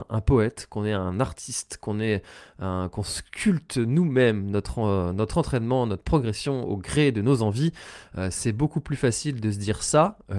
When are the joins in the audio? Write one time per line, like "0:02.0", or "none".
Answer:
none